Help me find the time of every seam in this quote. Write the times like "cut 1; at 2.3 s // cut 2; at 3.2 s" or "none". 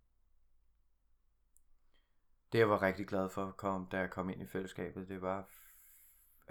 none